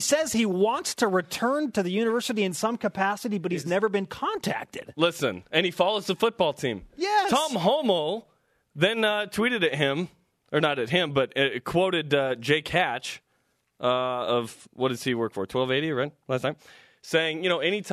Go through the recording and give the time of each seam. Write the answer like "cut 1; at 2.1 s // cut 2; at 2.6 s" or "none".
none